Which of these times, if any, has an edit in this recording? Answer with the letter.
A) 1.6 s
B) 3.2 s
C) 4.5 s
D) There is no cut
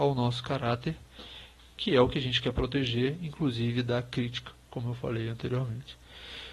D